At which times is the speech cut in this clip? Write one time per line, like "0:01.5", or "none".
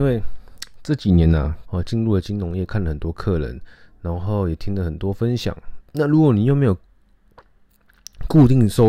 0:01.6
0:05.8